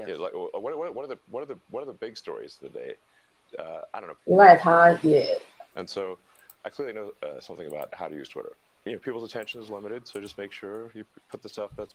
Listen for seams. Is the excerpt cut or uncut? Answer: cut